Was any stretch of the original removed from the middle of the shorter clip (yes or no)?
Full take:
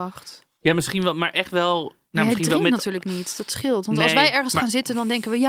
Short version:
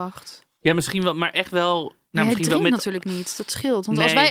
no